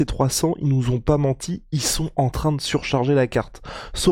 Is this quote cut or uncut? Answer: uncut